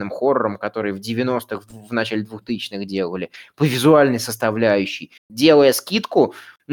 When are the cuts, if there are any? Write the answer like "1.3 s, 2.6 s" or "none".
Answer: 5.2 s